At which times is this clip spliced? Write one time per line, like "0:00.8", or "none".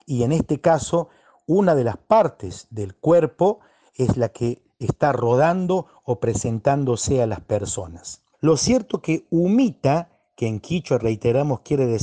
0:08.3